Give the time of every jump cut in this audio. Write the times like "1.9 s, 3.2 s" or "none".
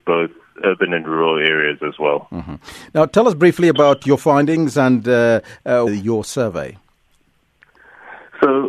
5.9 s